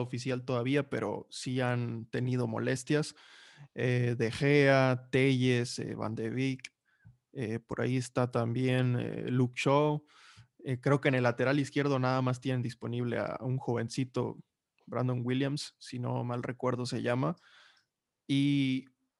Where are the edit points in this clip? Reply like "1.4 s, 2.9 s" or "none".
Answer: none